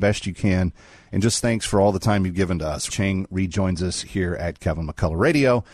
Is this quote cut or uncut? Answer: cut